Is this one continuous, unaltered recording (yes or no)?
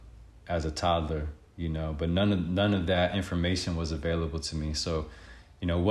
yes